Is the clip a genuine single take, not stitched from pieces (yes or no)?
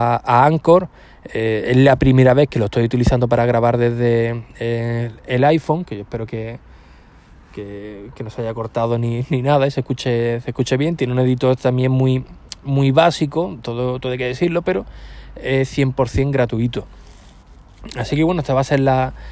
yes